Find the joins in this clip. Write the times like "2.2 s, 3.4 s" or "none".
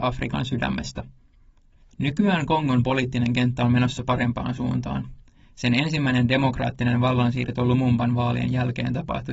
1.8 s